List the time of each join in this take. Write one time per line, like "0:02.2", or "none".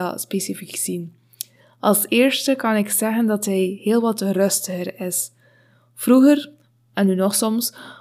none

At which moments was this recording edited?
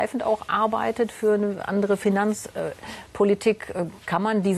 none

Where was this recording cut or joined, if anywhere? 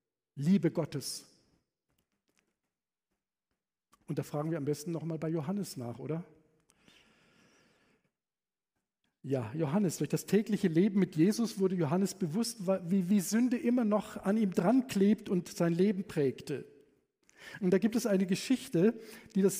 none

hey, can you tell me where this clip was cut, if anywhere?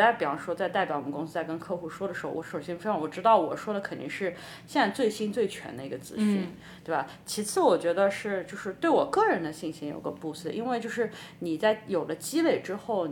0:02.3

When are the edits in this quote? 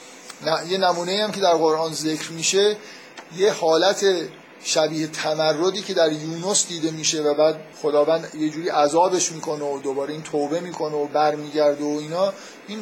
0:07.7

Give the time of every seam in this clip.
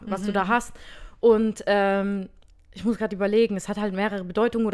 none

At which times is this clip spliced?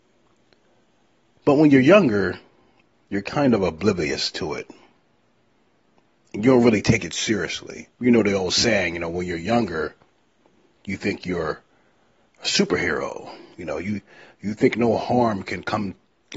0:07.9

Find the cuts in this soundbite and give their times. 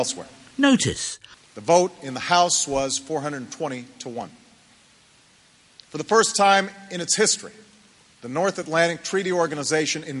0:01.3

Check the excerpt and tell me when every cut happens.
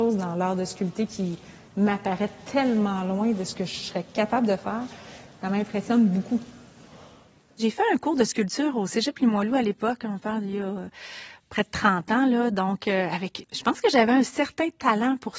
0:13.4

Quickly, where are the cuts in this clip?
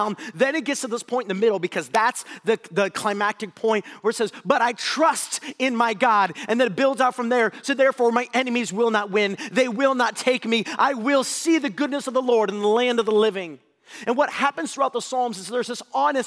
none

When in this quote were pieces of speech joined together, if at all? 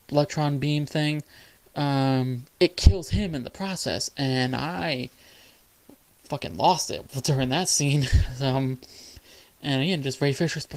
0:02.4

